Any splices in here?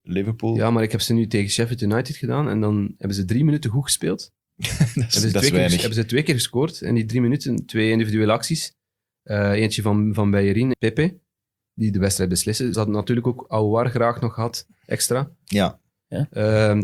yes; 2 cuts; at 10.7 s, 12.7 s

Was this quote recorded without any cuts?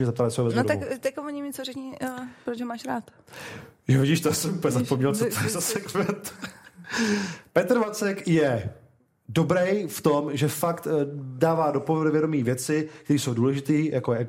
yes; 0 cuts

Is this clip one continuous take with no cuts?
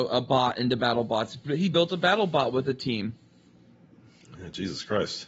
yes; 0 cuts

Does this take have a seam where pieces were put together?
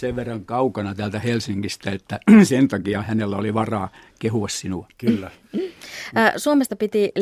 no; 0 cuts

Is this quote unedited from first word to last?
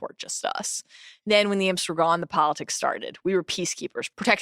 yes; 0 cuts

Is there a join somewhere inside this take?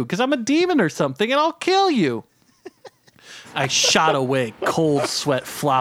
no; 0 cuts

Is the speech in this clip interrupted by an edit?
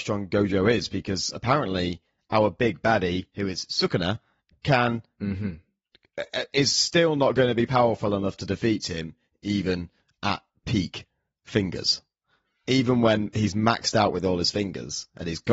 no; 0 cuts

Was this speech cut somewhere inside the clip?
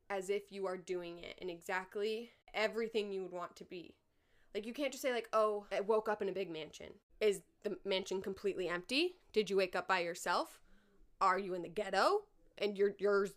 no; 0 cuts

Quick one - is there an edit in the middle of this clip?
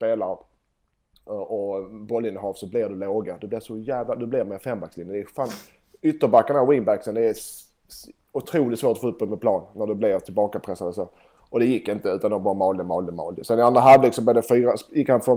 no; 0 cuts

